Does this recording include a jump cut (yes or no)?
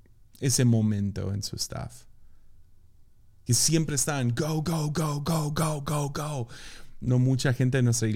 yes